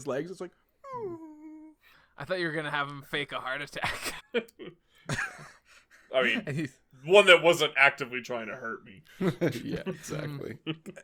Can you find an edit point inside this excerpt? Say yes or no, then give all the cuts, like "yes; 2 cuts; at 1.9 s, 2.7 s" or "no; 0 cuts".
yes; 1 cut; at 4.2 s